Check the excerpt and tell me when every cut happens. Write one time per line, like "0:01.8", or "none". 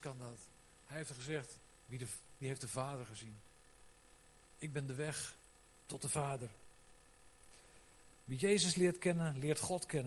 0:02.4